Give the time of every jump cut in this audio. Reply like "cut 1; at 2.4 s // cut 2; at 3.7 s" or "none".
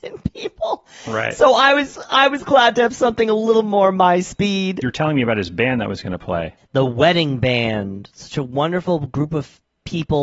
none

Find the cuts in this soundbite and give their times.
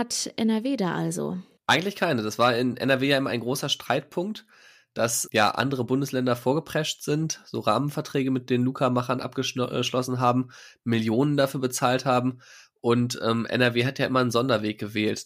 none

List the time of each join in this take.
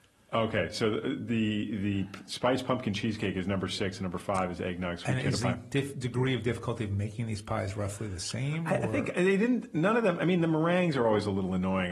none

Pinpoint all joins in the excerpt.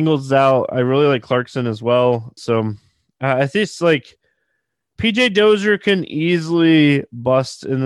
cut 1; at 2.4 s

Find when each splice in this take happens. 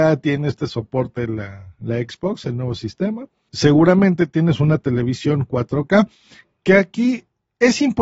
cut 1; at 3.5 s

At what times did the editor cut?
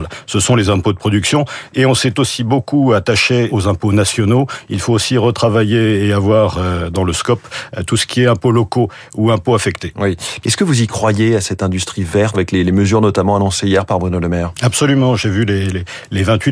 cut 1; at 3.5 s // cut 2; at 10.4 s // cut 3; at 12.3 s

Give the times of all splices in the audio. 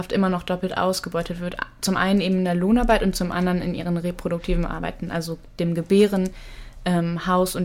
none

